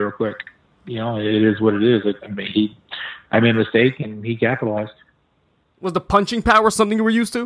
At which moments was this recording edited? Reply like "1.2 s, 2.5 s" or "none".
none

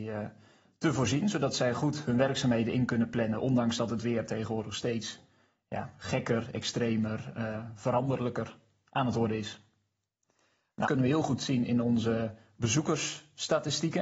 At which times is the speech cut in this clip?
10.9 s

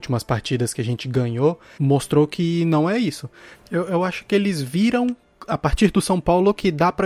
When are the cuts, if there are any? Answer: 1.8 s, 3.5 s

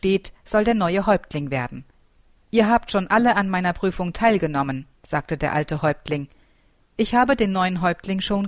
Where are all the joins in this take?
2.4 s

